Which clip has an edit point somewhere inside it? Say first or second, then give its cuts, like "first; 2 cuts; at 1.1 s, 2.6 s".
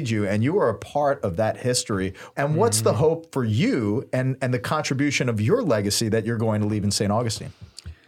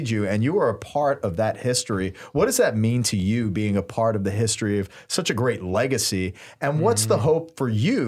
first; 1 cut; at 2.3 s